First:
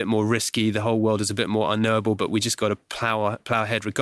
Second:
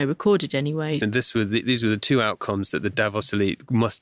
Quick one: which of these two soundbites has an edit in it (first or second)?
second